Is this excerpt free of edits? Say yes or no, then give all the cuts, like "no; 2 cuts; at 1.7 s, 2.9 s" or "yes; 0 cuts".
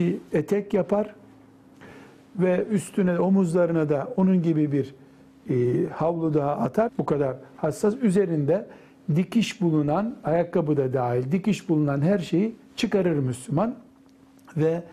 no; 1 cut; at 6.9 s